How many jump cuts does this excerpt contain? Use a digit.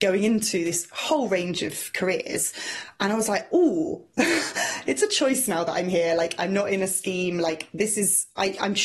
0